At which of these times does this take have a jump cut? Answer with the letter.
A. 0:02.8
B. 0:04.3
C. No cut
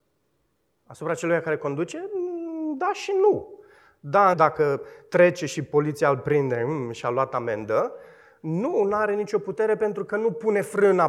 B